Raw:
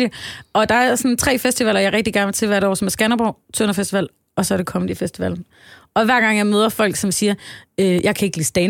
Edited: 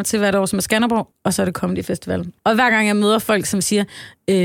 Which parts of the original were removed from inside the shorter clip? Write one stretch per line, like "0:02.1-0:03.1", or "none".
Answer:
0:03.4-0:04.2
0:05.5-0:05.9